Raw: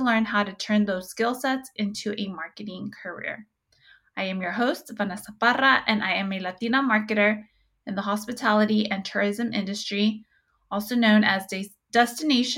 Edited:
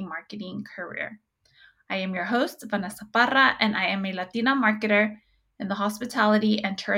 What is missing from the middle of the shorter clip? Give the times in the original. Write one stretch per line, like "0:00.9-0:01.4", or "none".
none

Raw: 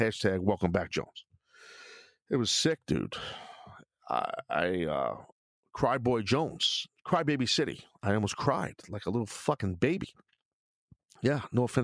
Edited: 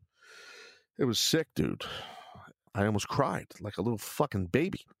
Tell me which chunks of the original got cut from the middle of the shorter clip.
0:04.0-0:08.0

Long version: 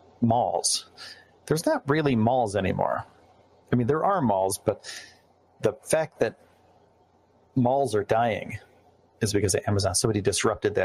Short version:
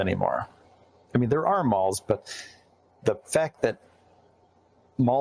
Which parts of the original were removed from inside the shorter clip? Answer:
none

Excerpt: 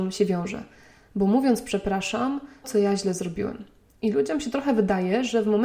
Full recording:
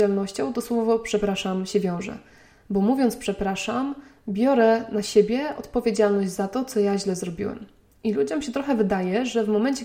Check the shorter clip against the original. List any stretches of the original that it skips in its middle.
0:04.2-0:06.7

